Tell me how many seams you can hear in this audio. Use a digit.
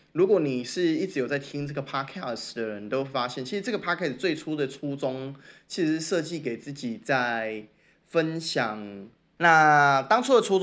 1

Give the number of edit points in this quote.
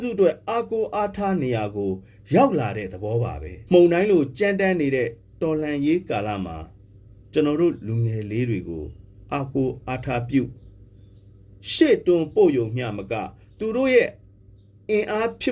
1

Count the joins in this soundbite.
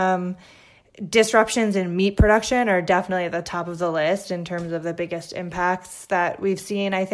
0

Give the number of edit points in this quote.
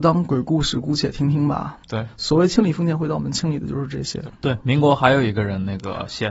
2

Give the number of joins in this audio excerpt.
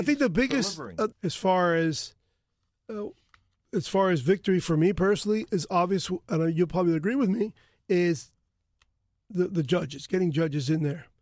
1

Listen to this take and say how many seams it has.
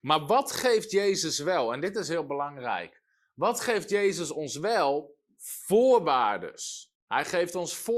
1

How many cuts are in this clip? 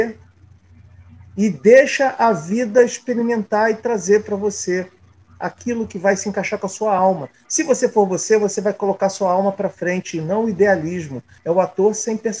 1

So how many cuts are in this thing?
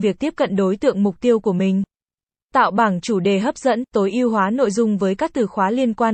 1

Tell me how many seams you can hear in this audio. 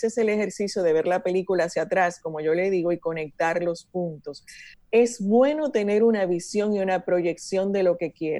1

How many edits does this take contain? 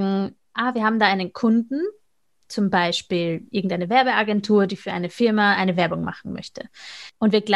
0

